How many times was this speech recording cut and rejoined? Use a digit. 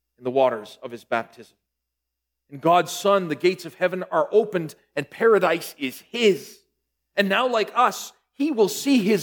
0